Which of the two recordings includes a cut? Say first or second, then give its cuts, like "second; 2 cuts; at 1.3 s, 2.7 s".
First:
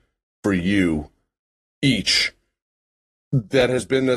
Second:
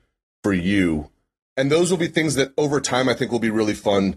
second; 1 cut; at 1.4 s